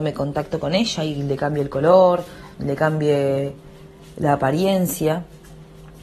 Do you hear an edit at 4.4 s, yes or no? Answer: no